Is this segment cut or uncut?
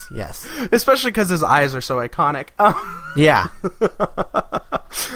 uncut